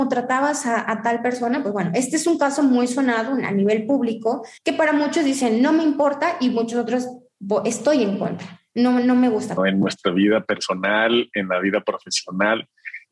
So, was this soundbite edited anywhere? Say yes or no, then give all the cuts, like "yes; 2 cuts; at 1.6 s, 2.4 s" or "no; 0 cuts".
yes; 2 cuts; at 4.6 s, 9.6 s